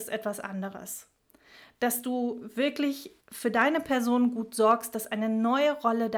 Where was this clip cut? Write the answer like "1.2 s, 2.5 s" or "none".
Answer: 3.2 s